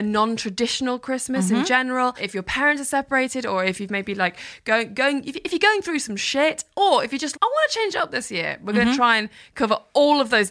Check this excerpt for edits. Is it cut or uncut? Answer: cut